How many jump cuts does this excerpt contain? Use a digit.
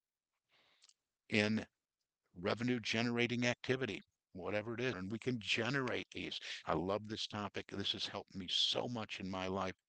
2